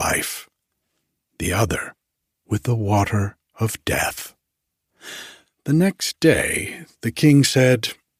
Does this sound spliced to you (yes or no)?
yes